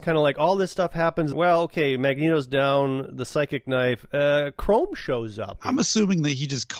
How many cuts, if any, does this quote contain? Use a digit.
2